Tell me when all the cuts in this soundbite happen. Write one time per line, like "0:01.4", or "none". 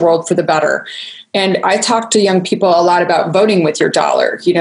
none